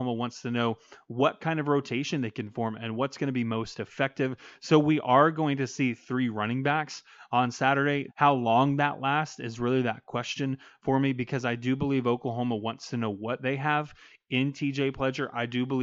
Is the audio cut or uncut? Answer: cut